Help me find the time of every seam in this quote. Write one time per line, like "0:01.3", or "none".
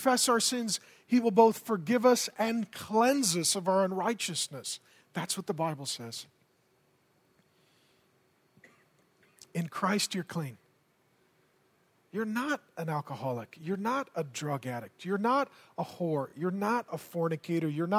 none